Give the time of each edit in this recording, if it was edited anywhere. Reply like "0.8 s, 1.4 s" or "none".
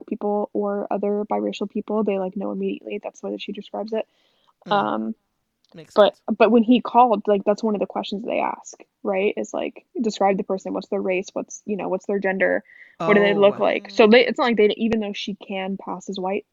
none